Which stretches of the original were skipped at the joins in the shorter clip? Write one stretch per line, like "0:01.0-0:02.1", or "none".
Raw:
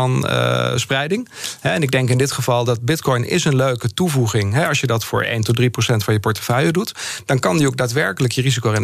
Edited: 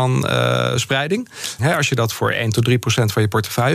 0:01.6-0:04.5